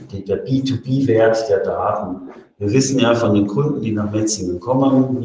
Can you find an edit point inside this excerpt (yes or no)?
no